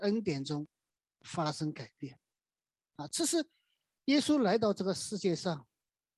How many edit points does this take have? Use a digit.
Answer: 0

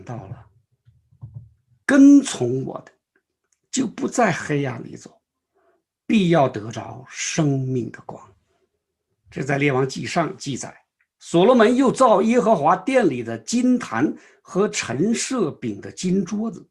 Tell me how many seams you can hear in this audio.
2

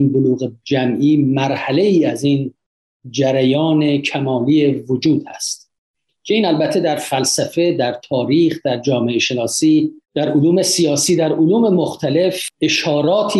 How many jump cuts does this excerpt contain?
1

